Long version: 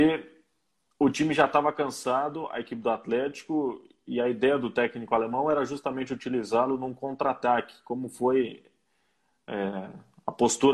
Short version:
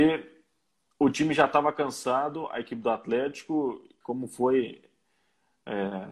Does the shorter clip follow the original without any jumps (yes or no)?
no